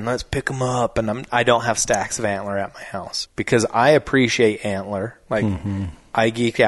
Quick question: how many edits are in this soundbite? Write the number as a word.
one